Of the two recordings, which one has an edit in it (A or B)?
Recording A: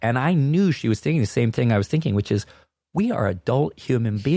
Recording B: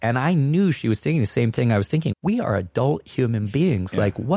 B